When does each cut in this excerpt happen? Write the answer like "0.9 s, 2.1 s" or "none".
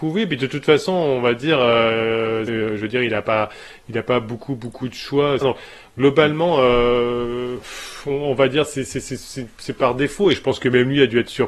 2.5 s, 5.4 s

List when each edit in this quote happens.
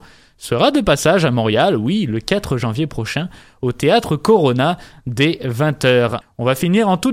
6.2 s

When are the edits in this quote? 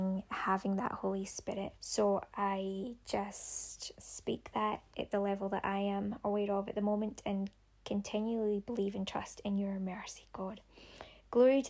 1.8 s

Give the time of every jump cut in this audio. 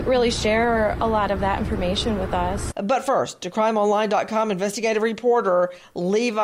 2.7 s

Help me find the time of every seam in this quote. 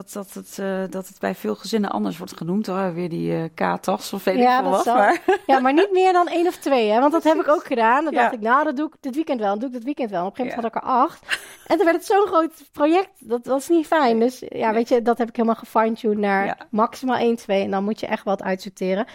none

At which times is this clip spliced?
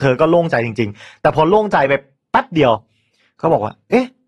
none

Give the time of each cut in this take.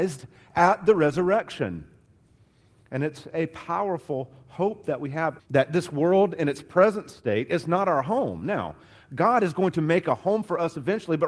5.4 s

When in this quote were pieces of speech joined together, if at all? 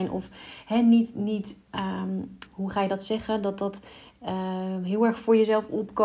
2.5 s

